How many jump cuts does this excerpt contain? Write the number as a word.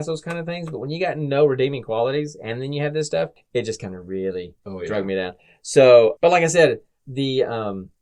one